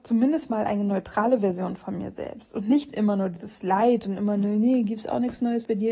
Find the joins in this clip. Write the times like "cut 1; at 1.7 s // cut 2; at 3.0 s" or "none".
none